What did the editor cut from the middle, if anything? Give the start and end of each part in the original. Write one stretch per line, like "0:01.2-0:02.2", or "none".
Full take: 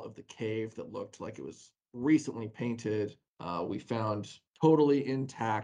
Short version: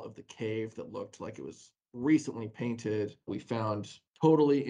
0:03.3-0:03.7